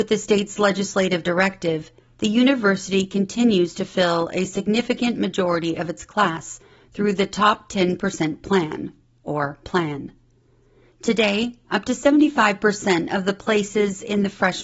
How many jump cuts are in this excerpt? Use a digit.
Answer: 0